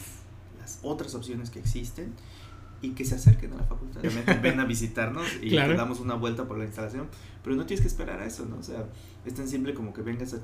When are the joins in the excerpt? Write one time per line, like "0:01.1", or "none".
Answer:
0:04.0